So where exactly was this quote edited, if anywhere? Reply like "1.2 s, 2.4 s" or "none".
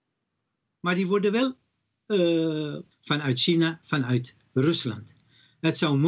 2.9 s